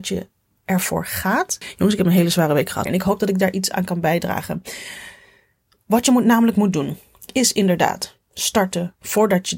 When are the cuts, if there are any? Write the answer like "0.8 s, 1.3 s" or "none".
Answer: 1.6 s, 2.9 s